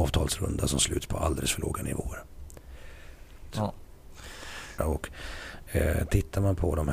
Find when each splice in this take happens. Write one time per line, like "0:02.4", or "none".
0:03.5
0:04.8